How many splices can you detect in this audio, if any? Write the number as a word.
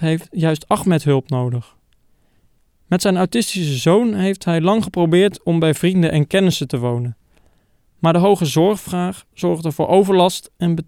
zero